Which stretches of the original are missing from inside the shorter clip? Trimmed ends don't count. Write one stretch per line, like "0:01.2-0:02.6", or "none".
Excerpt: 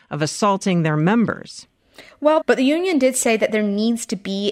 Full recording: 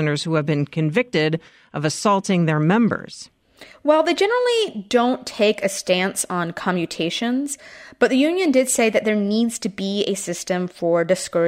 0:04.0-0:07.9